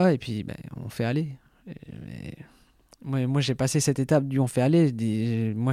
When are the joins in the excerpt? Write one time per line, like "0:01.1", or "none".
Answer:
none